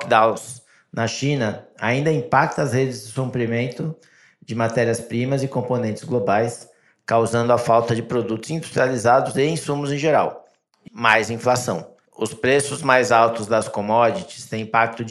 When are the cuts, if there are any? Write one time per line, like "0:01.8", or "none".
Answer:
0:10.9
0:12.1